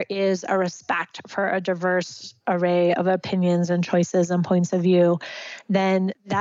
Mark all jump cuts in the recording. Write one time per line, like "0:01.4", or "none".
none